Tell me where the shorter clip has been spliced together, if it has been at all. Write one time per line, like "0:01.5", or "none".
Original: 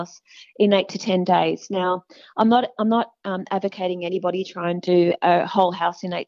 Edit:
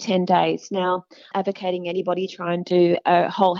0:01.3